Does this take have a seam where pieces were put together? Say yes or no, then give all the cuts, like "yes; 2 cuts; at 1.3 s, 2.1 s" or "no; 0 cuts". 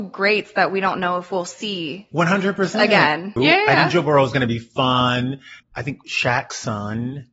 yes; 2 cuts; at 3.4 s, 5.6 s